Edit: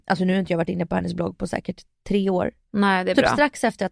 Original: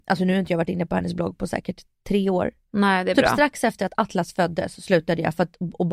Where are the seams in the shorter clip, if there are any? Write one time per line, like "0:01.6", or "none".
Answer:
none